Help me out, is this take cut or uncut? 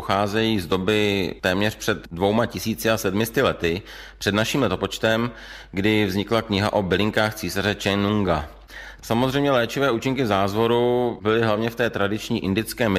cut